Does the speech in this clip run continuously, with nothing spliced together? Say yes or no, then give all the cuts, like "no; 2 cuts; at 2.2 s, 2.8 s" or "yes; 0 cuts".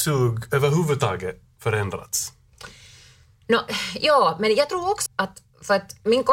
no; 1 cut; at 5.1 s